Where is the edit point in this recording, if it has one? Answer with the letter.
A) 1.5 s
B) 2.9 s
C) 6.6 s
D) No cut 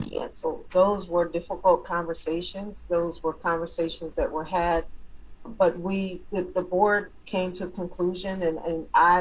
D